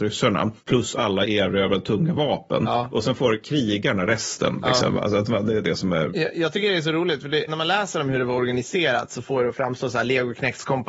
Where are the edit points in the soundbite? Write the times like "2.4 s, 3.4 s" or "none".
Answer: 5.6 s, 7.5 s

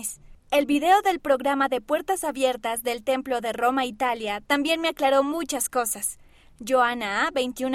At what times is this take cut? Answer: 6.5 s

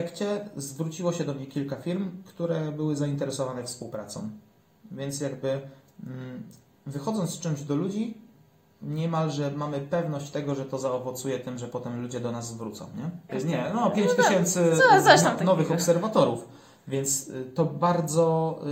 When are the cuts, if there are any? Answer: 13.3 s

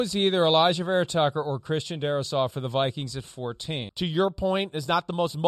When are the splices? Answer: 3.9 s

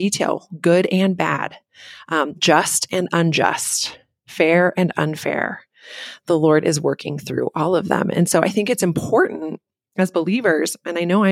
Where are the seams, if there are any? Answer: none

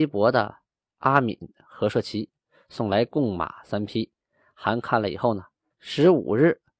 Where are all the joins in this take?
5.7 s

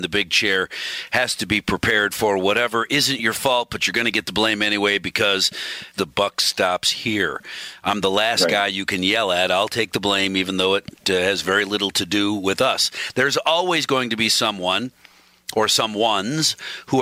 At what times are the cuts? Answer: 5.9 s

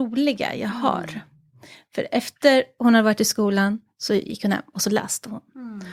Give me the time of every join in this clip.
none

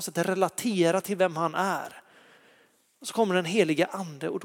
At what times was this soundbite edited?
none

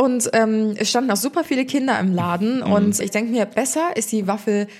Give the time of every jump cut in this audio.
3.0 s

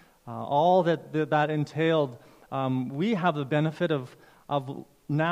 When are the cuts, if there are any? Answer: none

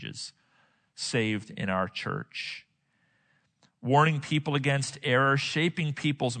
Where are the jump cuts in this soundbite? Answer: none

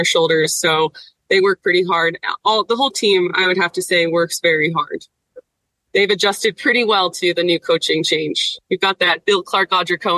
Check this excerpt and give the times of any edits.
none

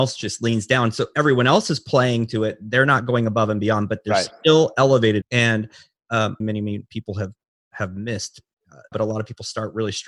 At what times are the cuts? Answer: 5.2 s, 6.4 s, 8.9 s

